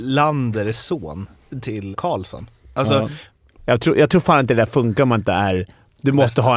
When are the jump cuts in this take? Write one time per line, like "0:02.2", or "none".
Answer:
0:01.9
0:03.6